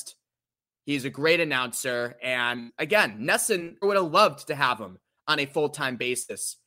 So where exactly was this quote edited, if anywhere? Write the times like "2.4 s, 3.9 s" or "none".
3.8 s

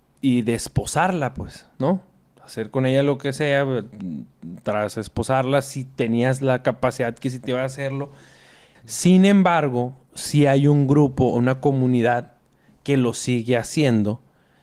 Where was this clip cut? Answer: 8.7 s

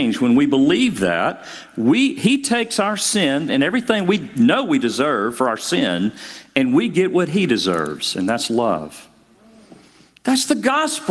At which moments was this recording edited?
3.5 s

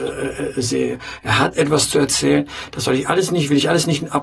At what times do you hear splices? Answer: none

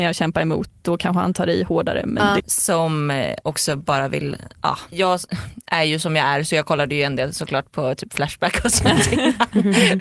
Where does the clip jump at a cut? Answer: 2.4 s, 4.9 s

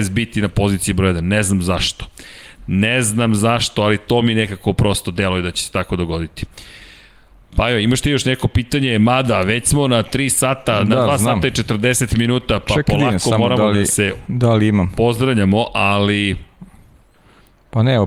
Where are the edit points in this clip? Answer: none

